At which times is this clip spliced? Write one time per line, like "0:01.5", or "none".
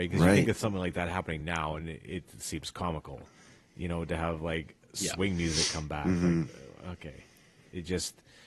none